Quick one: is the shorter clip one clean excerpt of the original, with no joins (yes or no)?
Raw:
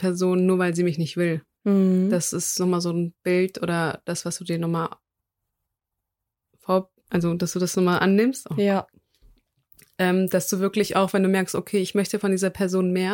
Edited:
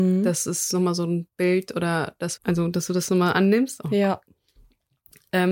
no